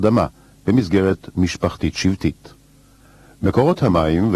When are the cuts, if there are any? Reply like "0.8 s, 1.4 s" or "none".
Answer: none